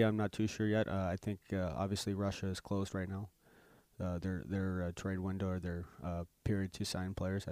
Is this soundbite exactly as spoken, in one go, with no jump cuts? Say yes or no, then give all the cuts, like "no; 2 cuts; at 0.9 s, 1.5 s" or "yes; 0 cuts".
yes; 0 cuts